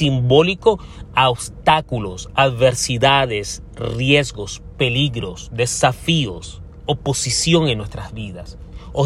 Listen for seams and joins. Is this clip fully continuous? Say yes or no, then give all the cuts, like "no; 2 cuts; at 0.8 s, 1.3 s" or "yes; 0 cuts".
yes; 0 cuts